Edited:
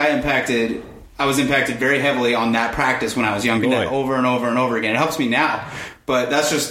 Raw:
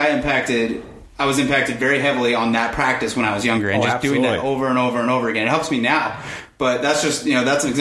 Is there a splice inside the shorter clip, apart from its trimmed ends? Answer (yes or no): yes